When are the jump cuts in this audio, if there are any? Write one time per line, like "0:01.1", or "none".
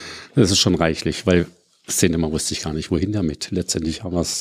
none